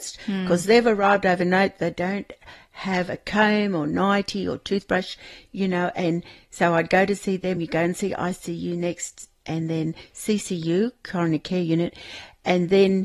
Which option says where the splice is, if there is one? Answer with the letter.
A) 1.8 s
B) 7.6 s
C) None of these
C